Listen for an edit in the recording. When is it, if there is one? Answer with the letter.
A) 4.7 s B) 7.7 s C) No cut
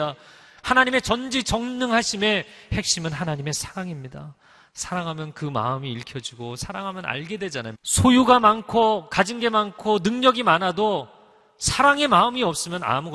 B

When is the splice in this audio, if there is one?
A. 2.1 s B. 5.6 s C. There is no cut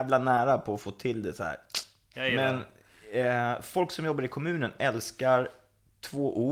A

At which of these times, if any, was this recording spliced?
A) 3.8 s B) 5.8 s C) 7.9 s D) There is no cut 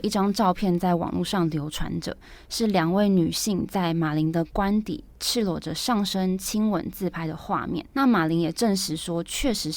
C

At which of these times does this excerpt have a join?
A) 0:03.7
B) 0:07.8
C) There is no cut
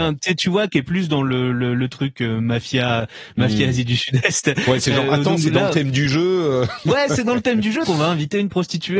B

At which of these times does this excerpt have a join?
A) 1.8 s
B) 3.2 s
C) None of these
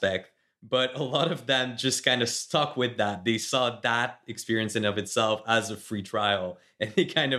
C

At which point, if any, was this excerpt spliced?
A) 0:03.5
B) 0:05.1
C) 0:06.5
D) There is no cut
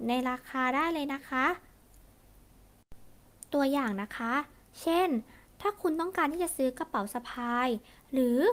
A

